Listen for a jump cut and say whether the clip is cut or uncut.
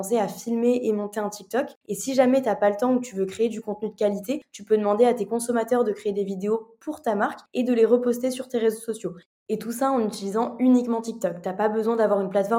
cut